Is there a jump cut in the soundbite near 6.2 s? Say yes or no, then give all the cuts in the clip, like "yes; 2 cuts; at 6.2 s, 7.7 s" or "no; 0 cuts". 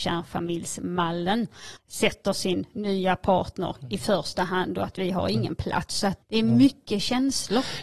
yes; 2 cuts; at 1.8 s, 6.2 s